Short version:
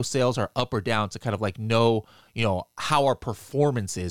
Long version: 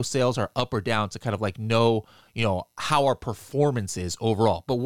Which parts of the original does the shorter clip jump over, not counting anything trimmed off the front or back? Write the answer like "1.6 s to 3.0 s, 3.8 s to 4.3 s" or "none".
none